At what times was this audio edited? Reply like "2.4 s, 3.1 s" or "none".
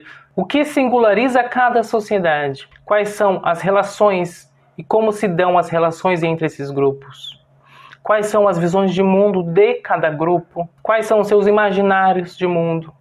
2.7 s, 10.8 s